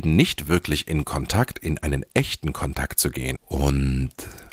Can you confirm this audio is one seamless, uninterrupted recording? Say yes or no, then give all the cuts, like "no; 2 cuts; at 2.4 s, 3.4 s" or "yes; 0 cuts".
no; 1 cut; at 3.4 s